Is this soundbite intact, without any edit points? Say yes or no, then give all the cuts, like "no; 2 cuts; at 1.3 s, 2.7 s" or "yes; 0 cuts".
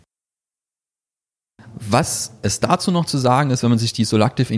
yes; 0 cuts